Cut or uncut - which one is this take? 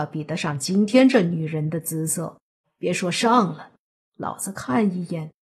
cut